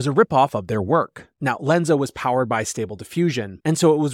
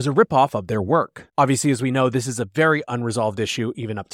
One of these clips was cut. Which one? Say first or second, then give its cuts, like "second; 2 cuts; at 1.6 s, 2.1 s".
second; 1 cut; at 1.3 s